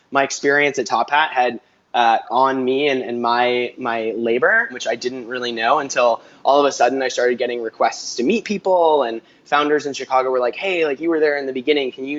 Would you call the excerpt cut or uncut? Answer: cut